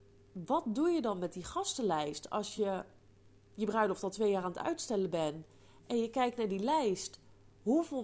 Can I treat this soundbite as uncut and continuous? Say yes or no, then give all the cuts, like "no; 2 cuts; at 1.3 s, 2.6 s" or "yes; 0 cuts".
yes; 0 cuts